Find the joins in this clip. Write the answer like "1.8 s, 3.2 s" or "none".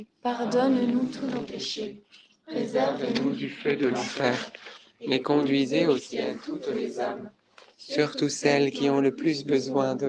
none

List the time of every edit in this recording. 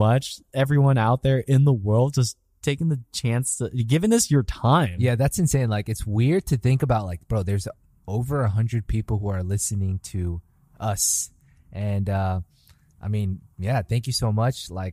5.0 s

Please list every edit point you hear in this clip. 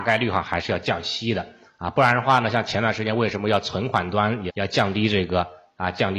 4.5 s

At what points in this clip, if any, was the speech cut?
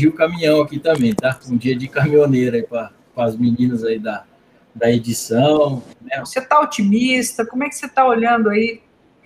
6.2 s

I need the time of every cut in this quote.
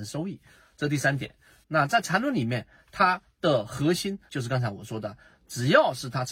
1.6 s, 4.3 s

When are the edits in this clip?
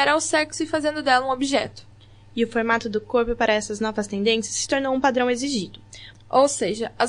6.1 s

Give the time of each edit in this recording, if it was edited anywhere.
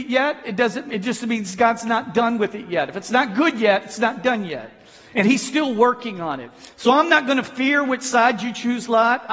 none

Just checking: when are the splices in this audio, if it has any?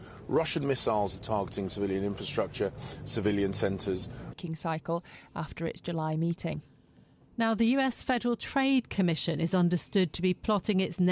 4.3 s

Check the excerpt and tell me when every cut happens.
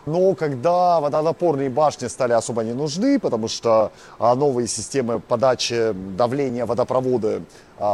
none

